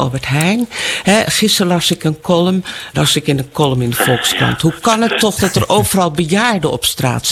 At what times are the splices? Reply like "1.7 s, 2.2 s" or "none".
2.9 s

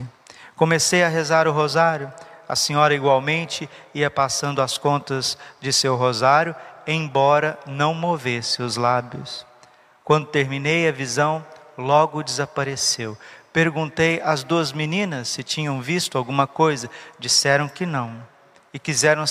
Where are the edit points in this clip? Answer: none

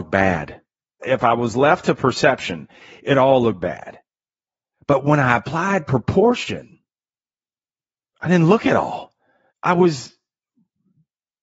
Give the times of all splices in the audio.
8.1 s, 9.5 s

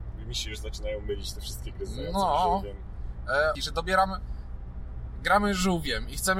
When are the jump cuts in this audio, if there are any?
3.5 s

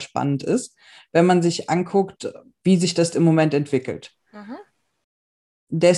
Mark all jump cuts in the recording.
none

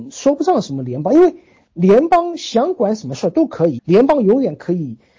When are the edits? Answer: 3.8 s

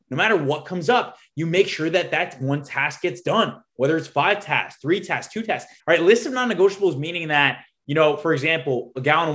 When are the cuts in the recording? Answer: 5.8 s

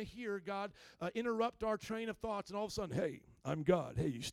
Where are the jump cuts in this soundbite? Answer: none

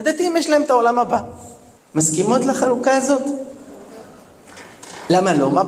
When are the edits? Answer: 1.8 s

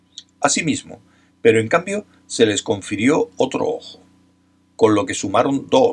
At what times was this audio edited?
1.3 s

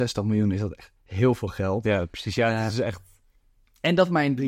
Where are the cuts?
none

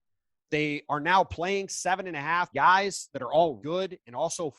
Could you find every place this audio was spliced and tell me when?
2.5 s, 3.6 s

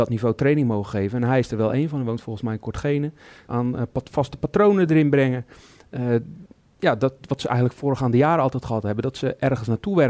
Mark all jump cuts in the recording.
3.5 s

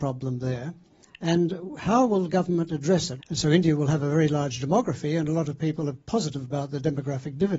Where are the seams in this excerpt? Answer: 3.2 s, 5.9 s

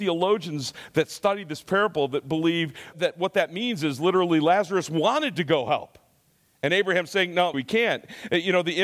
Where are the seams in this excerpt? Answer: 2.9 s, 7.5 s

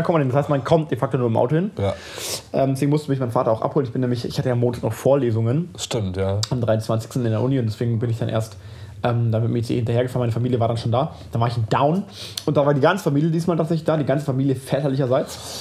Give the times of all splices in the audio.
none

